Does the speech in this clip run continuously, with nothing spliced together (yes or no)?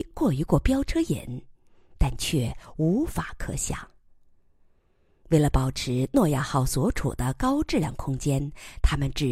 yes